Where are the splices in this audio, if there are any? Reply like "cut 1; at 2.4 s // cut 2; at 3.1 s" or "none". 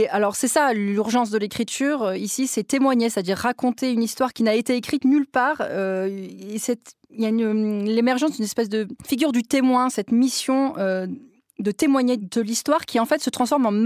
none